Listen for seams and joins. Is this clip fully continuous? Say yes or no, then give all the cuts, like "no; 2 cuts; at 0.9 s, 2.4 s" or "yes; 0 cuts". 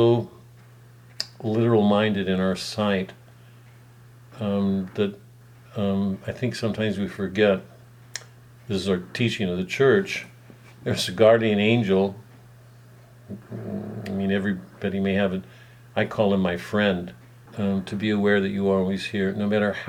no; 1 cut; at 17.5 s